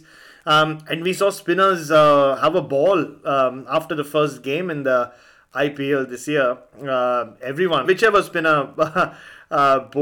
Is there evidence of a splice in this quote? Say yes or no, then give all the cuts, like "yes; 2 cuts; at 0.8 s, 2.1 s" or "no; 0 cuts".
yes; 1 cut; at 7.8 s